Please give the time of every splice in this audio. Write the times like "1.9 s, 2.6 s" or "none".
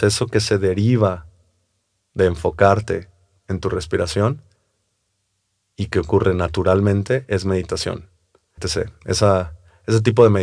8.6 s